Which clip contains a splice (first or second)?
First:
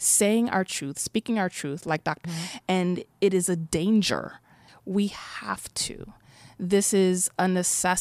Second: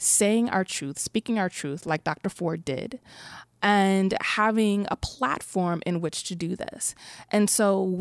first